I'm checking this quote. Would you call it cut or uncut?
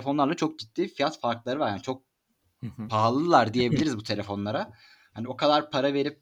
uncut